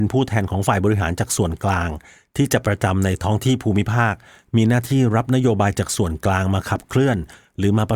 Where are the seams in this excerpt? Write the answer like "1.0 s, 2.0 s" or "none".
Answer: 2.6 s

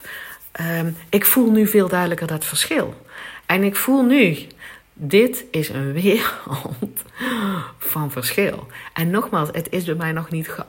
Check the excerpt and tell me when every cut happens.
3.4 s

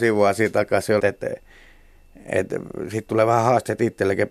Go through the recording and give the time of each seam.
1.0 s

